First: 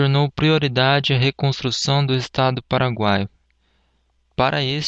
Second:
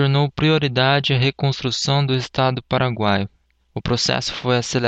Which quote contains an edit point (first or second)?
second